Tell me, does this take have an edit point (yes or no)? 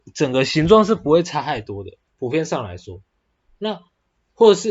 yes